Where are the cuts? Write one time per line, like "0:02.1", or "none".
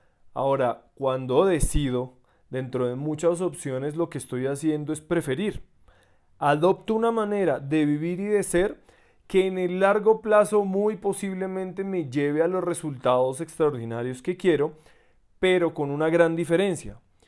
none